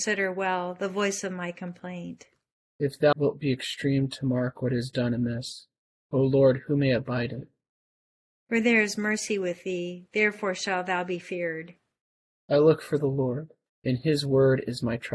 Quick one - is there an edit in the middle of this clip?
yes; 2 cuts; at 3.1 s, 13.7 s

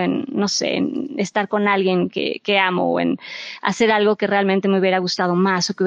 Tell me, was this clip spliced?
no; 0 cuts

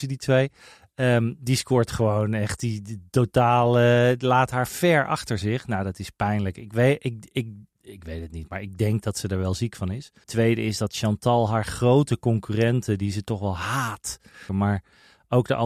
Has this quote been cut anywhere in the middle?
yes; 2 cuts; at 10.2 s, 14.5 s

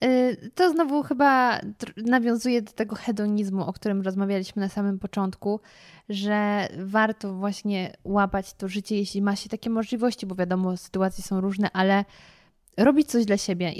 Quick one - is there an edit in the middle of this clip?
no; 0 cuts

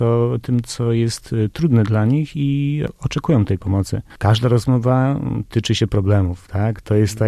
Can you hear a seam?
yes; 1 cut; at 4.1 s

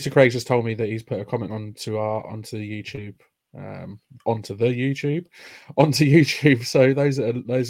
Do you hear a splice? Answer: no; 0 cuts

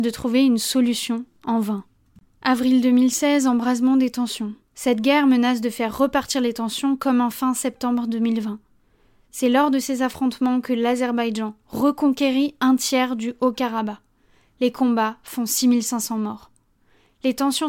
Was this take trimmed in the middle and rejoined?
yes; 1 cut; at 4.6 s

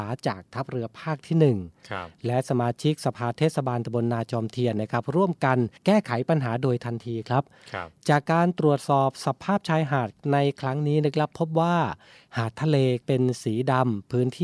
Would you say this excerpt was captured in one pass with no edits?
no; 1 cut; at 5.8 s

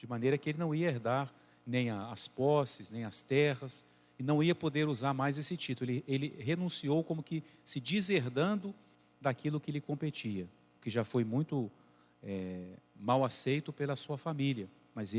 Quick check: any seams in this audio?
no; 0 cuts

